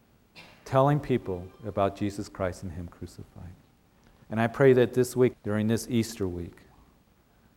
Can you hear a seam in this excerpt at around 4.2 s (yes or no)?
yes